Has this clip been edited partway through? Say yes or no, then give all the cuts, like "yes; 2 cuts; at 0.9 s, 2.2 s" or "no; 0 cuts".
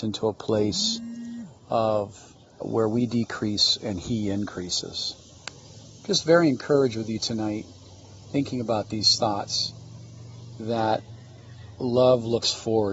yes; 1 cut; at 2.6 s